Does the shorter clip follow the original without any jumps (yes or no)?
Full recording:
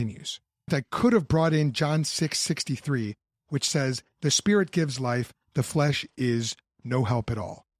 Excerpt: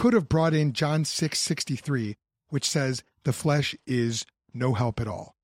no